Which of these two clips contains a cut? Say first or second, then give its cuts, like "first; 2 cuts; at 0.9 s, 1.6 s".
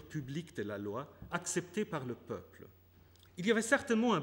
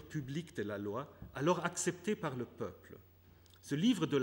first; 2 cuts; at 1.3 s, 3.3 s